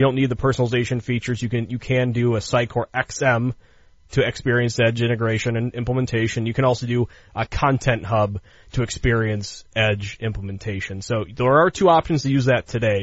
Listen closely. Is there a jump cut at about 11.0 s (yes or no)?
no